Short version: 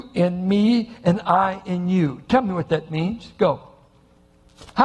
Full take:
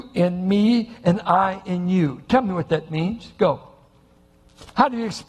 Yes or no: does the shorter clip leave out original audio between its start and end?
no